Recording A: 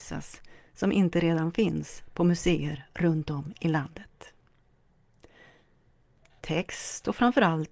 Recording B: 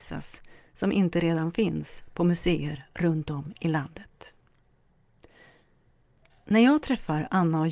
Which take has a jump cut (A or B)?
A